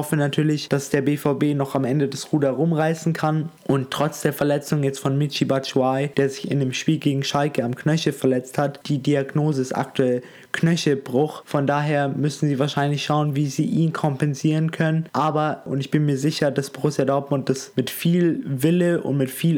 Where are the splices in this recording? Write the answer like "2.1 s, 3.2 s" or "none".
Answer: none